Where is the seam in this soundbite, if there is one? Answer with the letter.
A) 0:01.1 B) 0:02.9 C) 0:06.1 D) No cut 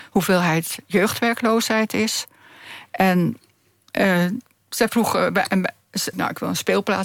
C